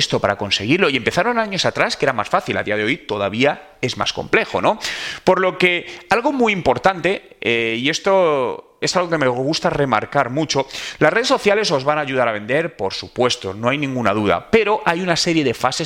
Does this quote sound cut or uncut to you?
uncut